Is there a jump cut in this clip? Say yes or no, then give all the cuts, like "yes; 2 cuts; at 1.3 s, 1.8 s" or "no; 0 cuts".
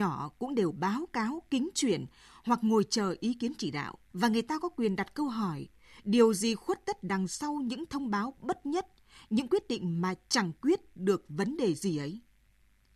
yes; 1 cut; at 4.1 s